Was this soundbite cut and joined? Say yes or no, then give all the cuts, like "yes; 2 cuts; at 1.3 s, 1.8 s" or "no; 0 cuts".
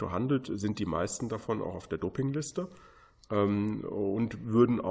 no; 0 cuts